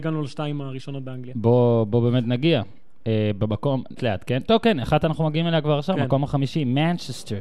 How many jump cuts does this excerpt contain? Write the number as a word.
one